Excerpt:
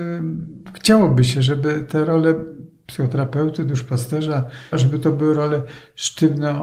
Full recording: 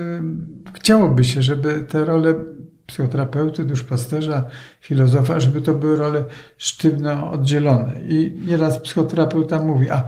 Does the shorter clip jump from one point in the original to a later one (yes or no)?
yes